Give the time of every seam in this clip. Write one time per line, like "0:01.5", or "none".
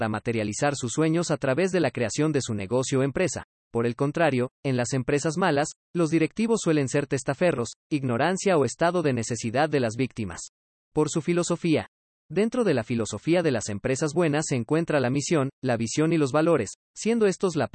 0:07.8
0:10.8